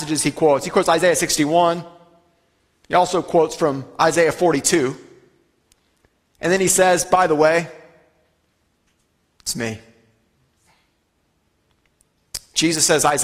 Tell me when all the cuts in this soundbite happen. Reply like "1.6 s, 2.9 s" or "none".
none